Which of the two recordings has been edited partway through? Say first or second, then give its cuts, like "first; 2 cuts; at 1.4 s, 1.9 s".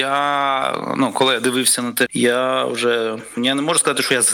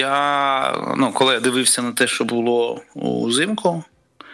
first; 2 cuts; at 2.1 s, 3.4 s